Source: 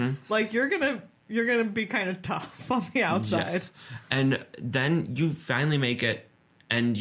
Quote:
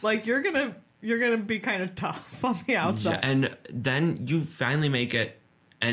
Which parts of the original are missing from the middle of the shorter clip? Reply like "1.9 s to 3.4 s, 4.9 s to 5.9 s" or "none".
3.4 s to 4.1 s